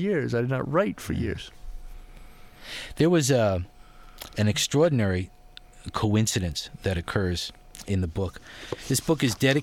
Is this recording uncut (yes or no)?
yes